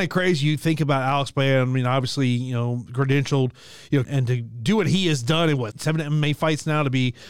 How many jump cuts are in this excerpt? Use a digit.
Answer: 2